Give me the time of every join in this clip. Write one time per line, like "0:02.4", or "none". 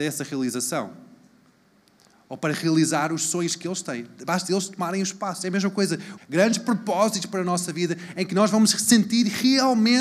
0:06.2